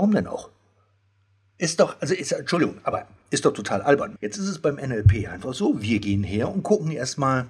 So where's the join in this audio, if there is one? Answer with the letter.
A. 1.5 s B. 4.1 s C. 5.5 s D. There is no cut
B